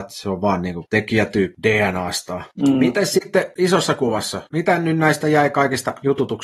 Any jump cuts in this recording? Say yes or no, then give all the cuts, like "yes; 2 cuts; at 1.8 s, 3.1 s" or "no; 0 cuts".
no; 0 cuts